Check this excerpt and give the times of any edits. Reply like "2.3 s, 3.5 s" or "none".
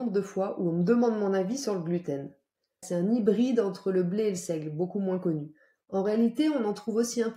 2.8 s